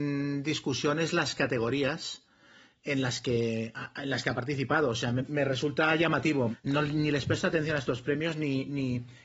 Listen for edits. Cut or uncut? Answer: cut